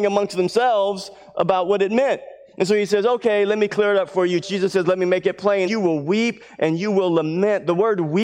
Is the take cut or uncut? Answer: cut